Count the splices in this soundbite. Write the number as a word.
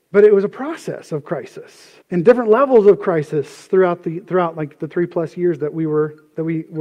one